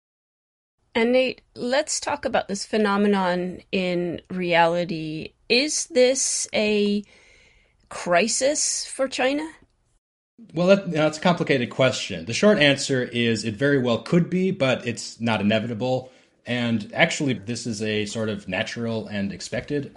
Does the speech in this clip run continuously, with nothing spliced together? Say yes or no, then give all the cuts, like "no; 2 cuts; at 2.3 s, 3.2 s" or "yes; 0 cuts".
no; 1 cut; at 17.4 s